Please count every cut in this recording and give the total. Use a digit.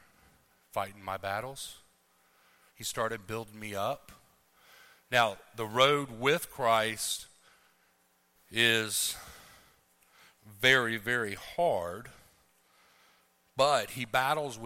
1